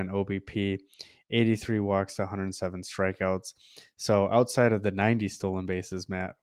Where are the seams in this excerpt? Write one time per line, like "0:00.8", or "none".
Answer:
none

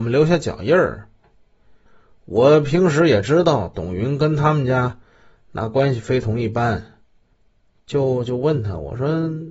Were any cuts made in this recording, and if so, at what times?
0:01.2

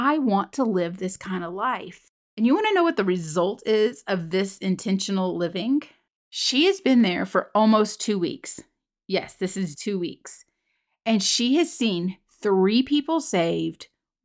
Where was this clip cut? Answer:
0:09.8

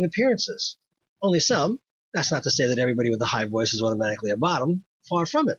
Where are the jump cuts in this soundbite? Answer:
0:02.0

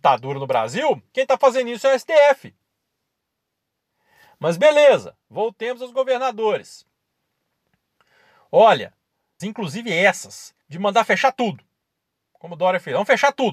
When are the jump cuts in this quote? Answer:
0:09.4
0:10.6

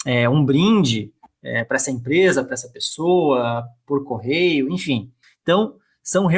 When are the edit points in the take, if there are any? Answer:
none

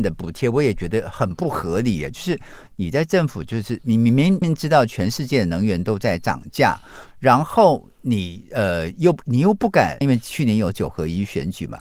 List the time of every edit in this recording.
0:04.4
0:10.0

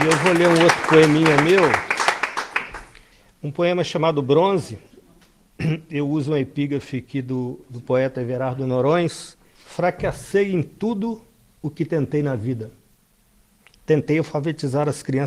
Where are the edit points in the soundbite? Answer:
0:09.4

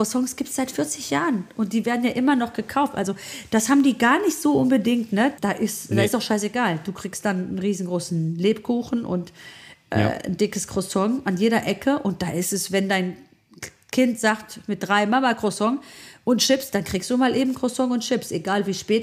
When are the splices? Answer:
0:05.4

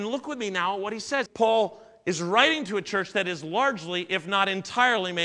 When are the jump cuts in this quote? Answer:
0:01.3

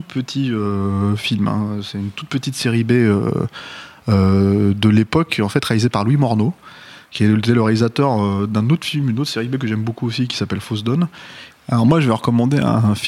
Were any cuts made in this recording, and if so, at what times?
0:11.5

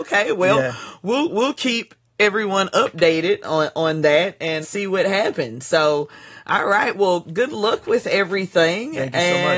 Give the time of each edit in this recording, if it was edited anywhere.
0:04.6

